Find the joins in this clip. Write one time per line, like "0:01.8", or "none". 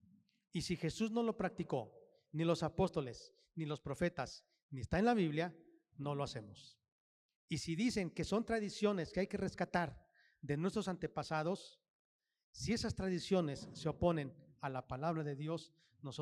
none

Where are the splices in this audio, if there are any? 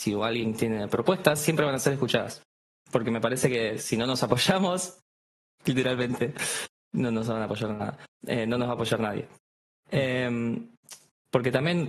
none

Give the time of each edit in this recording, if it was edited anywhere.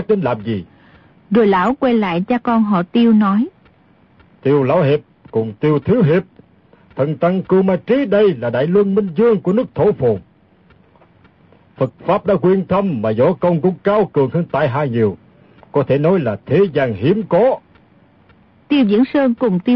none

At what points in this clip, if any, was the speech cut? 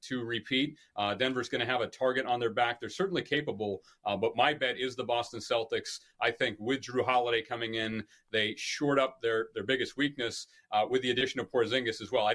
none

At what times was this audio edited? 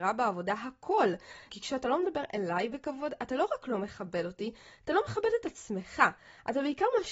0:01.5

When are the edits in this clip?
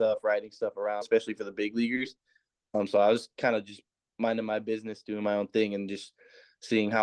0:01.0

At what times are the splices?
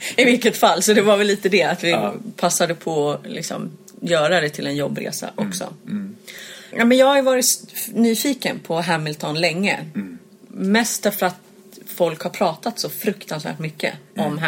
0:06.7

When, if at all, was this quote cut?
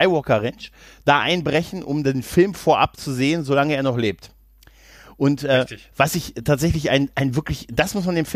none

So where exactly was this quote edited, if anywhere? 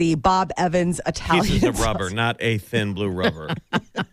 none

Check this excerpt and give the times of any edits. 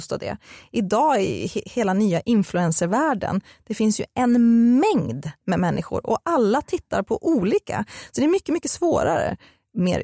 none

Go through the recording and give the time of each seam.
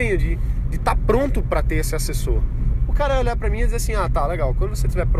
0:02.8

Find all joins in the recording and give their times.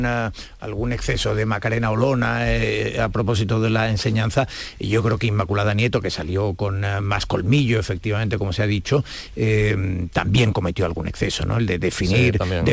none

